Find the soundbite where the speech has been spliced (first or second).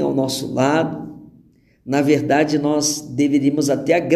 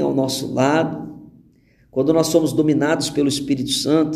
second